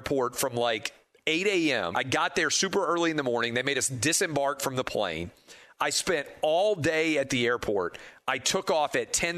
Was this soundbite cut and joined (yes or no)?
yes